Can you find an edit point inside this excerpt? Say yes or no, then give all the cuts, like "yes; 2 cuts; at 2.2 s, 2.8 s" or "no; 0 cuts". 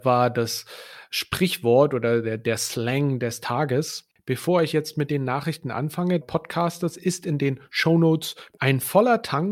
yes; 2 cuts; at 6.2 s, 8.6 s